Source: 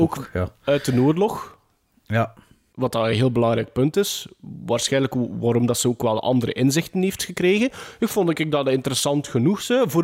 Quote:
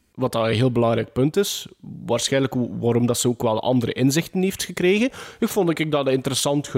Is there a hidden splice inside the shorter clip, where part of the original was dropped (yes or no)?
no